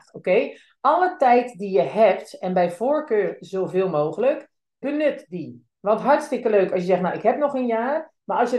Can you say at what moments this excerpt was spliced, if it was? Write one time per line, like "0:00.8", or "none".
0:04.8